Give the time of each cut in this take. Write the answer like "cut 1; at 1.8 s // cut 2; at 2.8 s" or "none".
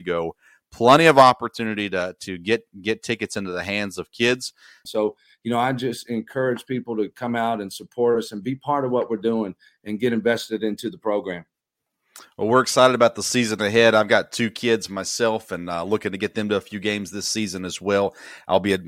cut 1; at 4.9 s

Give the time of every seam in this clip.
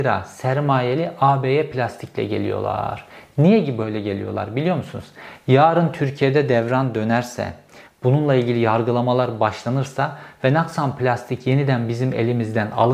cut 1; at 7.8 s

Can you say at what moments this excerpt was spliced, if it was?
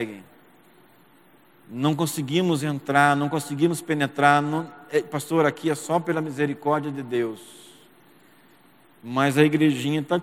none

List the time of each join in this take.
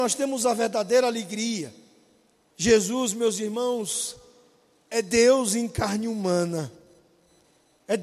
cut 1; at 2.5 s

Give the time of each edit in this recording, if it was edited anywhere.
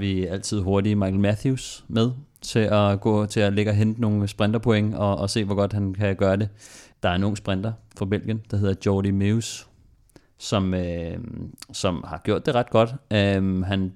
cut 1; at 6.9 s

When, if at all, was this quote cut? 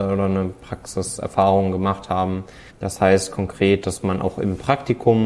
cut 1; at 2.7 s

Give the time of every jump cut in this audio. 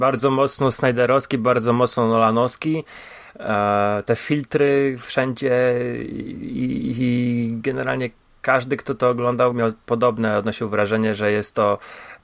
cut 1; at 9.5 s

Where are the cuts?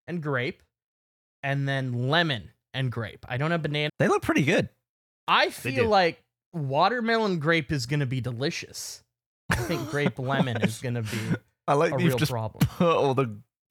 cut 1; at 3.9 s

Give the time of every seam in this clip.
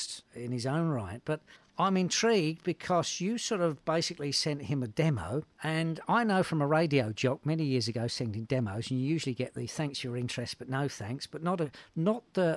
cut 1; at 5.5 s

